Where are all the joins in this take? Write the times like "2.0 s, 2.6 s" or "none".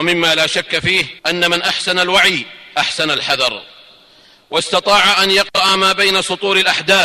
1.2 s